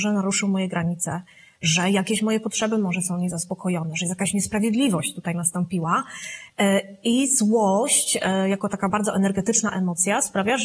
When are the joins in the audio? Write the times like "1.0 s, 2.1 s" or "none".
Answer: none